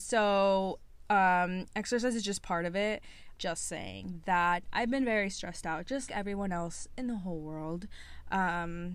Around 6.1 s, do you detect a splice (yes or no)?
yes